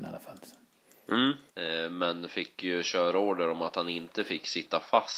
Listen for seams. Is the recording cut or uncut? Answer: cut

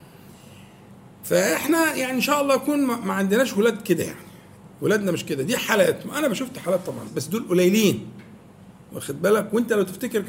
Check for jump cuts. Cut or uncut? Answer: cut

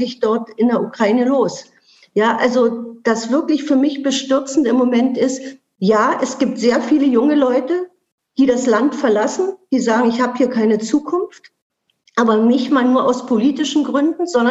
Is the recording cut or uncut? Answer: uncut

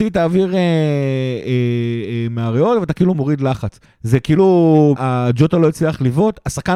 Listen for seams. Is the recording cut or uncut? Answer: cut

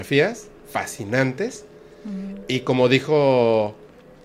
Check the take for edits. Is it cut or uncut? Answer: uncut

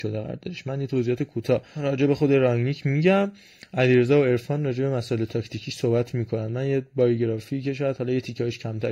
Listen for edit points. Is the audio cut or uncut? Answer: uncut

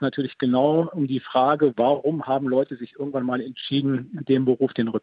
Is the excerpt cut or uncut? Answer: uncut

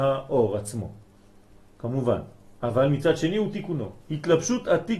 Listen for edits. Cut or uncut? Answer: cut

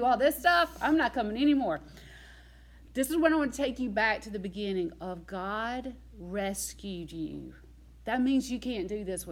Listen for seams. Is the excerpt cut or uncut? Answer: uncut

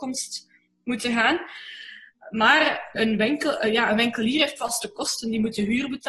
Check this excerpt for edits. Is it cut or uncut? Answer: cut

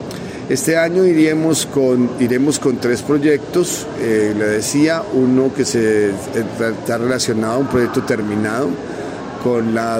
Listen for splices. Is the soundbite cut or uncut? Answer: uncut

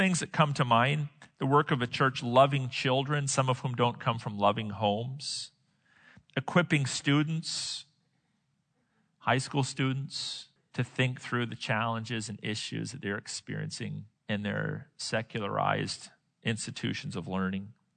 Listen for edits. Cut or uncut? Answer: cut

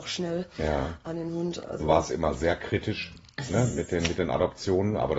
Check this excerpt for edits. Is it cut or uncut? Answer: uncut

